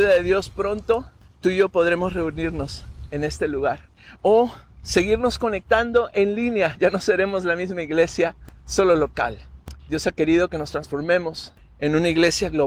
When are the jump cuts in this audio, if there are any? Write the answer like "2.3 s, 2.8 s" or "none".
none